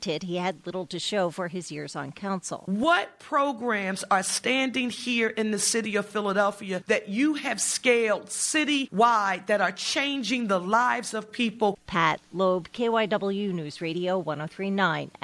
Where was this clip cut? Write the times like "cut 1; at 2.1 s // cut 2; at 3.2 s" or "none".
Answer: cut 1; at 11.8 s